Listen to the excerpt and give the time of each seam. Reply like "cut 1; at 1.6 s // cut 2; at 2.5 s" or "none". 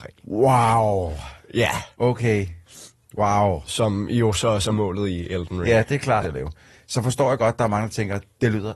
cut 1; at 6.2 s